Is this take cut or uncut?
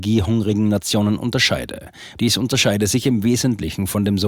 cut